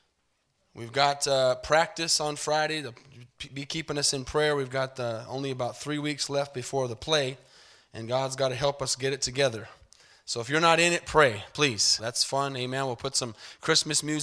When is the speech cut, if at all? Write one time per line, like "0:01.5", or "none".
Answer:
0:12.0